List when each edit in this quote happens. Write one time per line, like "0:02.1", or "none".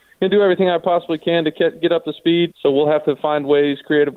0:02.5